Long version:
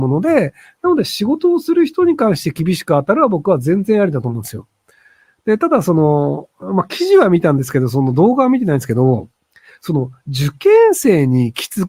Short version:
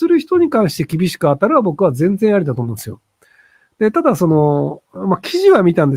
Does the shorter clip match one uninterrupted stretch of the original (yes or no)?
yes